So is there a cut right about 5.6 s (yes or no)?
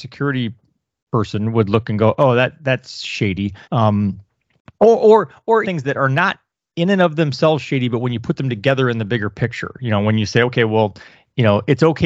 yes